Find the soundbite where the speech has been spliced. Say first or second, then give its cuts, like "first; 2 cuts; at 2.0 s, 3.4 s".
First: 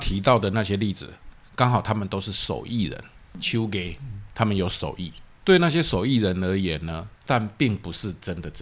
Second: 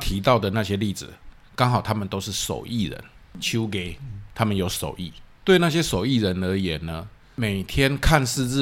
first; 1 cut; at 7.2 s